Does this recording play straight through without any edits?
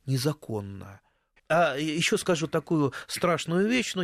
no; 1 cut; at 1.4 s

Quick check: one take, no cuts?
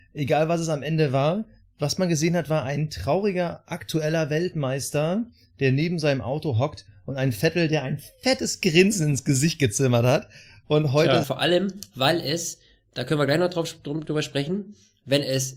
no; 1 cut; at 11.2 s

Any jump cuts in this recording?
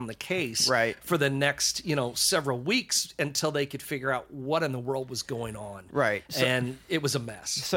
no; 0 cuts

